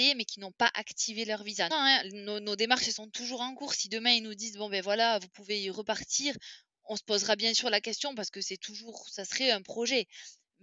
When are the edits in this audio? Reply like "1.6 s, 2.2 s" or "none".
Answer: 1.7 s